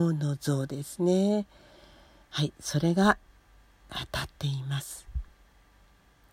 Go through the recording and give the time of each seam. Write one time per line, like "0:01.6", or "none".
none